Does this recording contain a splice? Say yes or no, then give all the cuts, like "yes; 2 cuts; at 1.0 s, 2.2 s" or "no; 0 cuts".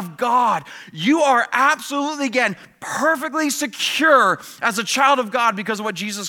no; 0 cuts